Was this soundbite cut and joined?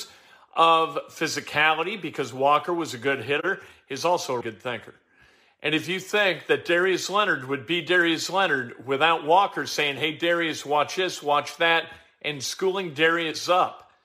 yes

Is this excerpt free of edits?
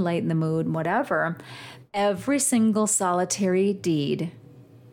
no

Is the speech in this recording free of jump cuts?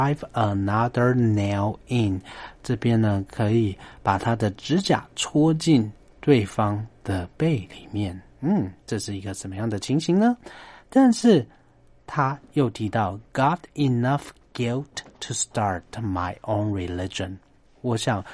yes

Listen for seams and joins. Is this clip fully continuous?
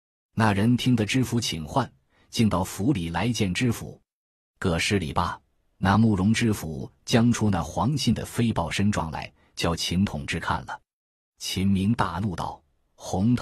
yes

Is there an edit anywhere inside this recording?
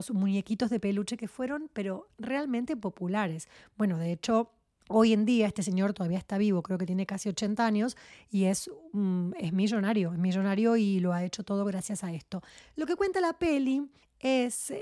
no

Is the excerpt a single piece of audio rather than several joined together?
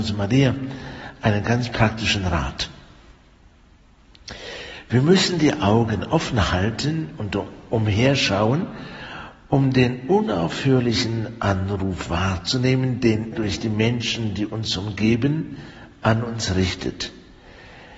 no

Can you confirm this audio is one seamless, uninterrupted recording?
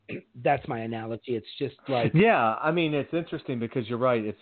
yes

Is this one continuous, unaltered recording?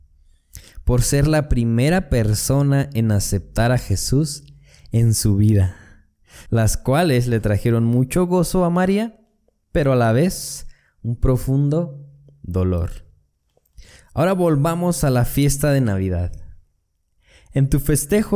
no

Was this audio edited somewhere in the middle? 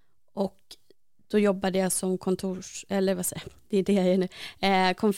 no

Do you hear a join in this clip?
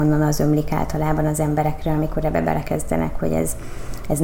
no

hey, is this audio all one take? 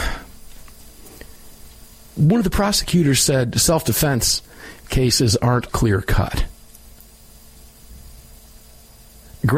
no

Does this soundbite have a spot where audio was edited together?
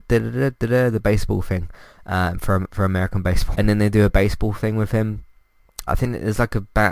yes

